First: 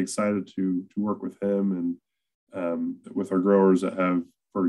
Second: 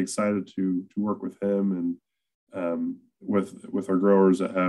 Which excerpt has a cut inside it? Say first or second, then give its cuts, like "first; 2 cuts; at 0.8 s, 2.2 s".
first; 1 cut; at 3.0 s